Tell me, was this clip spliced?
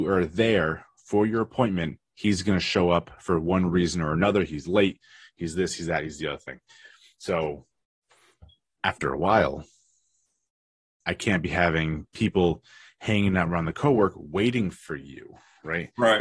no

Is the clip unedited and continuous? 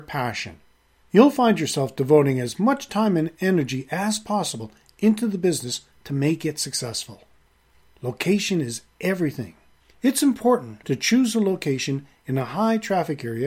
no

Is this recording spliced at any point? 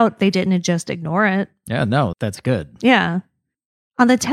yes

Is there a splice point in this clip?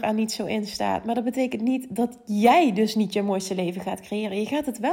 no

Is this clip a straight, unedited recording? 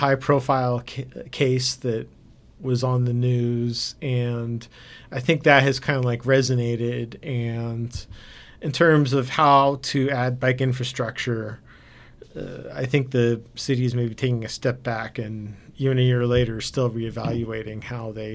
yes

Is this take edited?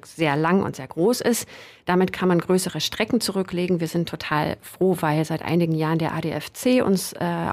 no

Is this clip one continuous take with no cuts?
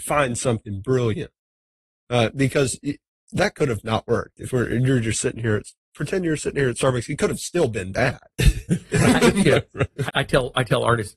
no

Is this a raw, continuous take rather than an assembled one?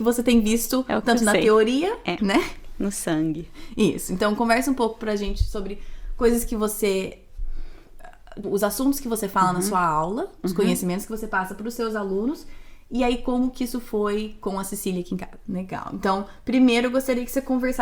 no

